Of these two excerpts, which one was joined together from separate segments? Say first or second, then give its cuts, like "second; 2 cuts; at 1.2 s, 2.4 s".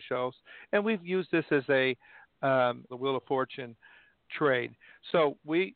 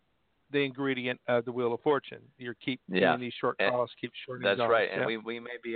first; 1 cut; at 2.9 s